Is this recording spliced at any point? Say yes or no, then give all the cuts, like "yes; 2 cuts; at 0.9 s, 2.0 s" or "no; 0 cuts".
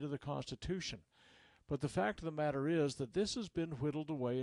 no; 0 cuts